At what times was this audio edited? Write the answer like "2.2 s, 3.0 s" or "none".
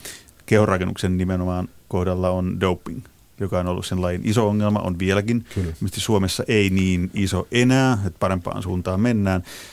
none